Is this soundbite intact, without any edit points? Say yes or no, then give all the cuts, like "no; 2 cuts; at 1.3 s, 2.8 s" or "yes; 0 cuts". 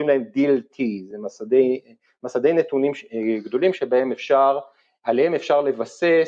yes; 0 cuts